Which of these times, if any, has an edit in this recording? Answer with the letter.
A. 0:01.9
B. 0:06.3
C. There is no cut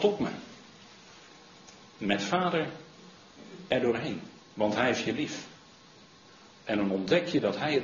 C